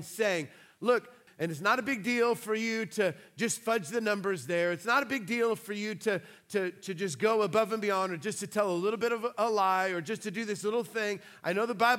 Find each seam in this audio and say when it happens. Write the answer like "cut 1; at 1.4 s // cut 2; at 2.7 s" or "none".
cut 1; at 1.3 s